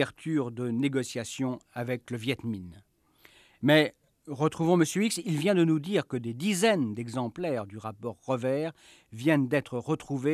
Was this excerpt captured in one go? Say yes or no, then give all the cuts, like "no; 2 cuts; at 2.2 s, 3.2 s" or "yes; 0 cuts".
yes; 0 cuts